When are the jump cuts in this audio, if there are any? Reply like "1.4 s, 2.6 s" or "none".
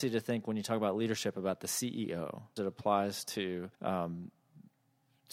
2.6 s, 3.7 s